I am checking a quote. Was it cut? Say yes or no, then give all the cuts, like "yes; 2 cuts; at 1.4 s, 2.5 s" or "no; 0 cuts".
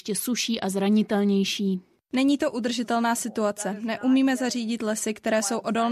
no; 0 cuts